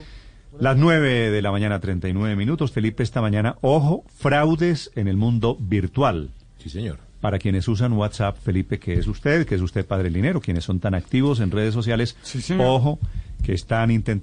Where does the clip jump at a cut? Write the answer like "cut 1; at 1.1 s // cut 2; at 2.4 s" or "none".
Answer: cut 1; at 2.7 s

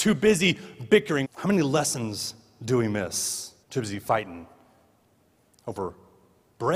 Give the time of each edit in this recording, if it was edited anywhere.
cut 1; at 1.2 s // cut 2; at 3.6 s

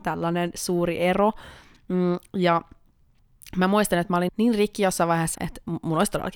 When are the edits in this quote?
cut 1; at 4.3 s // cut 2; at 5.3 s

